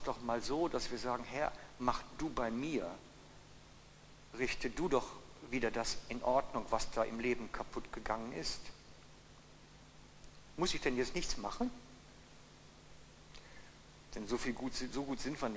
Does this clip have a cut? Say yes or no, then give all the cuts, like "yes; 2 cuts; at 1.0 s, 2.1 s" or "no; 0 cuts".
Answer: yes; 2 cuts; at 10.5 s, 14.1 s